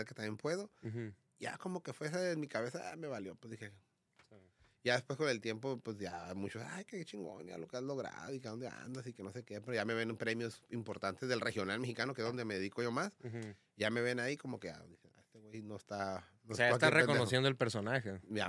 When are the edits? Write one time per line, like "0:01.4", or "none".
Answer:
none